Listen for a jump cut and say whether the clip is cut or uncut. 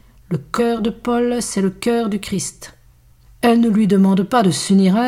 cut